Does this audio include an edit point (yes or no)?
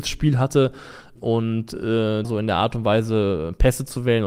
yes